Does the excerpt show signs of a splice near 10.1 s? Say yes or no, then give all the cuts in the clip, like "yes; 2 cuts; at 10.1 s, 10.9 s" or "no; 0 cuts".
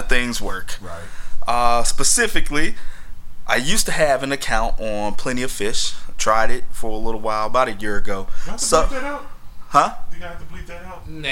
no; 0 cuts